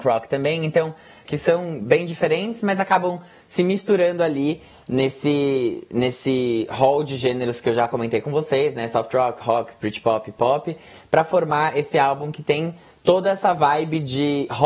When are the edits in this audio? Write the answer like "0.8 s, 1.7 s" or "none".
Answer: 1.3 s

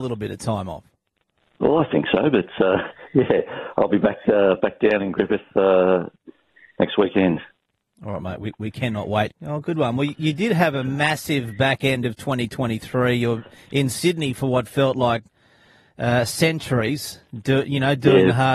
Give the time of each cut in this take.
9.3 s

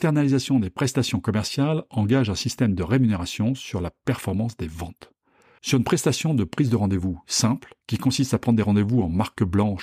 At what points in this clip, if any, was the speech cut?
5.6 s, 7.8 s

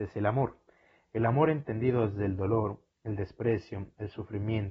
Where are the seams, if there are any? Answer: 2.9 s

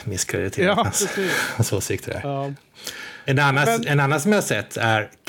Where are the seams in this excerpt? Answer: 3.3 s

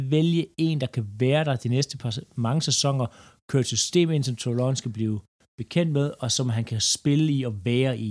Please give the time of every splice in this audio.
none

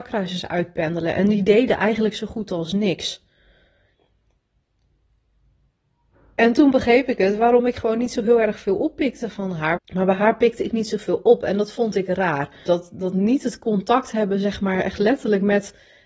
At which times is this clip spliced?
9.8 s, 12.7 s

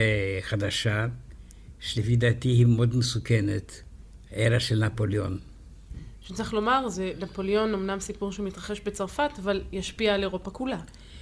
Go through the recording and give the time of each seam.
none

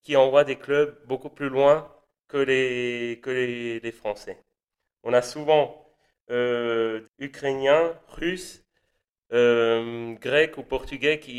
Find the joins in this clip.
7.0 s

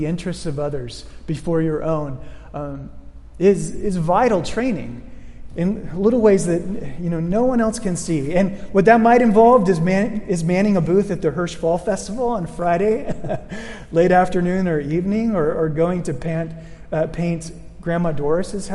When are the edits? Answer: none

